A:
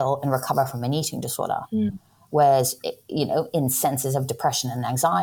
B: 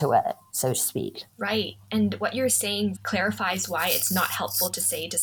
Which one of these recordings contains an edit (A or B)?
B